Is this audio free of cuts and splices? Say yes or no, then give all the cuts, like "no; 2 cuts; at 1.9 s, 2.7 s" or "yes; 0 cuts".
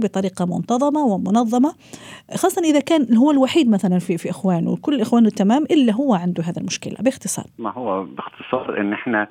no; 1 cut; at 7.5 s